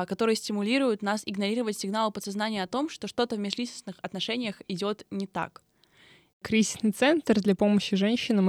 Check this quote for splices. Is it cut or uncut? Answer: cut